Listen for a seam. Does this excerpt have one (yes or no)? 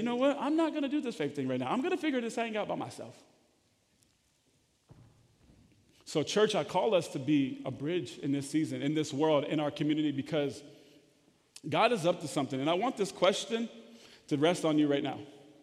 no